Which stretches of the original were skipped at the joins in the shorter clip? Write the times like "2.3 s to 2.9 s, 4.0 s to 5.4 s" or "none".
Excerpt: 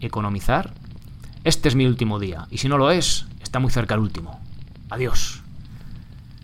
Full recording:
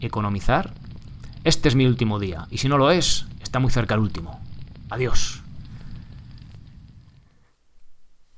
none